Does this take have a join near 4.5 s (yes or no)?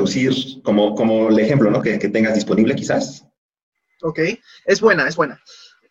no